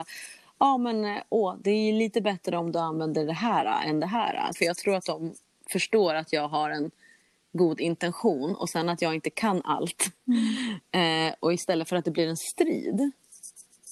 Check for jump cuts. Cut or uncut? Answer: cut